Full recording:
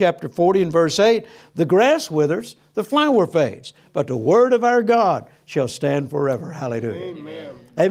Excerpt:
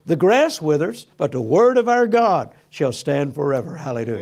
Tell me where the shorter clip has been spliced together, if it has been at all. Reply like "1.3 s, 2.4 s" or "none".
1.1 s